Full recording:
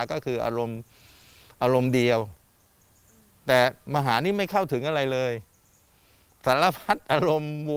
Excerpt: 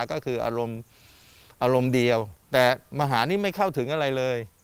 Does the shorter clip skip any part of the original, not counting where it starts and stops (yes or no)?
yes